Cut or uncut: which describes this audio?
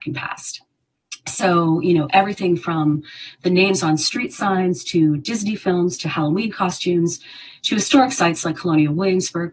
uncut